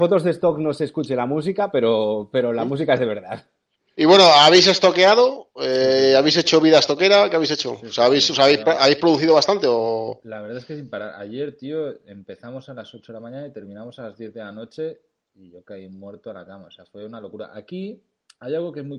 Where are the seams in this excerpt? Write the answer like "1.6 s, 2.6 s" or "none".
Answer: none